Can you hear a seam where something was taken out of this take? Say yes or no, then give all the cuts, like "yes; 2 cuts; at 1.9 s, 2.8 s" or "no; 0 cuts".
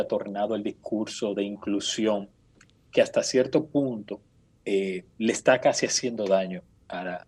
no; 0 cuts